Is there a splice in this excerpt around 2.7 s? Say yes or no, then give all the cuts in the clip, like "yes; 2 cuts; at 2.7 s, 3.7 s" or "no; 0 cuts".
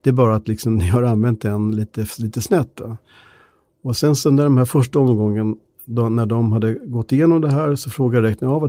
no; 0 cuts